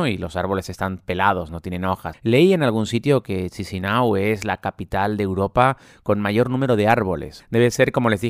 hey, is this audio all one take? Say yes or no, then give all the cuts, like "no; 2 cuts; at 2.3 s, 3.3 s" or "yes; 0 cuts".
no; 2 cuts; at 2.1 s, 7.4 s